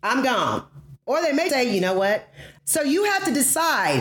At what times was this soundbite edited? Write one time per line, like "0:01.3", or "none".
0:01.5
0:02.6